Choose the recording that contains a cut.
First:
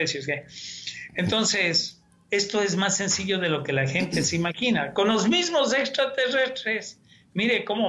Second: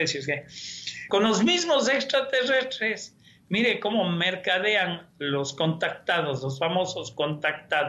second; 1 cut; at 1.1 s

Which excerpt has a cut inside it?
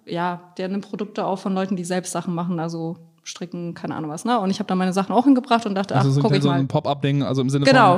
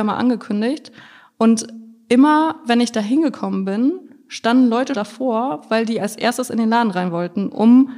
second; 1 cut; at 4.9 s

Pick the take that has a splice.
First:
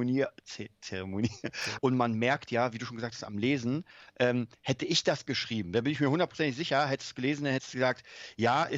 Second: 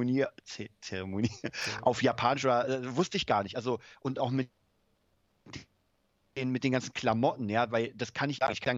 first; 1 cut; at 1.8 s

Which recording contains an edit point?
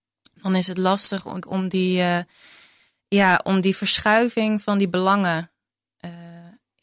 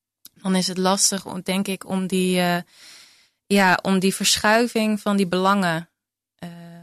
first; 1 cut; at 1.4 s

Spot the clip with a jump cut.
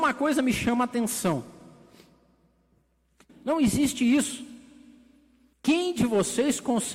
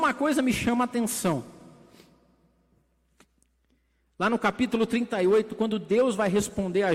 first; 2 cuts; at 3.3 s, 5.5 s

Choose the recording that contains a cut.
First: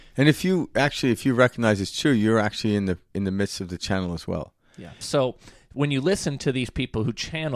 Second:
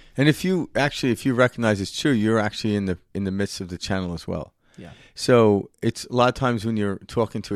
first; 1 cut; at 5.0 s

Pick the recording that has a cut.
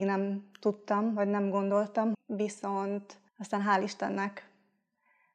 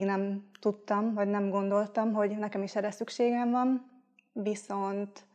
first; 2 cuts; at 2.1 s, 3.3 s

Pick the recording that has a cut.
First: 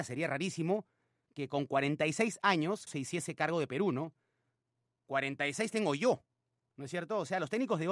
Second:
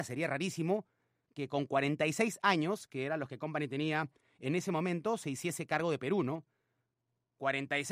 first; 1 cut; at 2.9 s

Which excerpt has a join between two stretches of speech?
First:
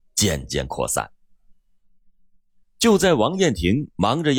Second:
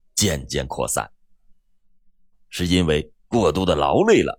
second; 1 cut; at 2.3 s

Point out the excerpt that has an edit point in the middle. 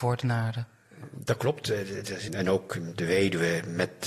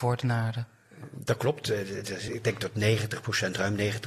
first; 1 cut; at 2.3 s

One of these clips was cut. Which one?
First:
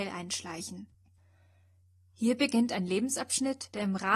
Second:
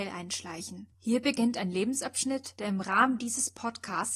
second; 1 cut; at 0.9 s

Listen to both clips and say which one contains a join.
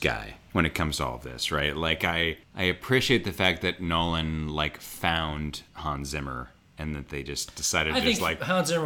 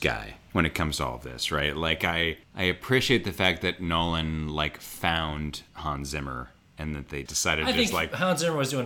second; 1 cut; at 7.3 s

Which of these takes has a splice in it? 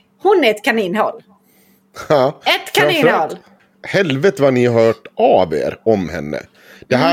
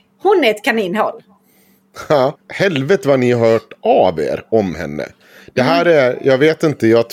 second; 1 cut; at 2.3 s

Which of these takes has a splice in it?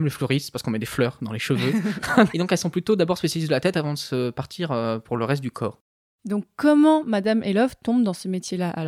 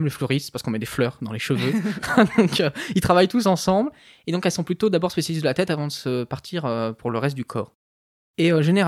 first; 2 cuts; at 2.3 s, 6.1 s

